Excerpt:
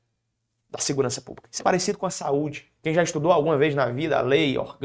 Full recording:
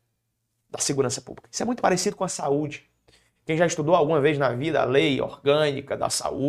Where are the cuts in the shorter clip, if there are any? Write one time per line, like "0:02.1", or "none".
0:01.6
0:02.7